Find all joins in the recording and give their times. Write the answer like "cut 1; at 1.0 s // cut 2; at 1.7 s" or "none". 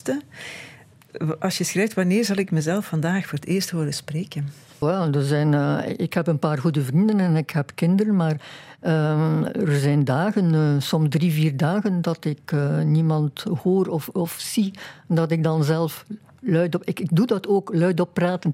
cut 1; at 4.8 s